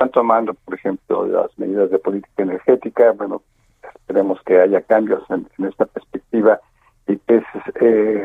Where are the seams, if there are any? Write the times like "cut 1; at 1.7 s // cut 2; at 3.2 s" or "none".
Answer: none